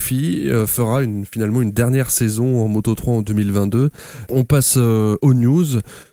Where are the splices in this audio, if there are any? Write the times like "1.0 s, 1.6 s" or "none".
4.3 s